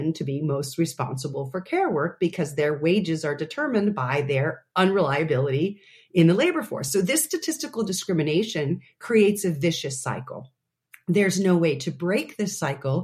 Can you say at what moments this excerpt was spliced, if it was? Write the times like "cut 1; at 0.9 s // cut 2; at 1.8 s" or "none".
none